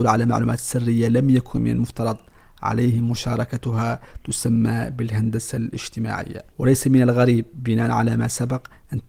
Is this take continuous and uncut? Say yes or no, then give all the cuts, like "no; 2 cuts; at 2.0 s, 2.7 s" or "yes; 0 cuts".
no; 1 cut; at 6.5 s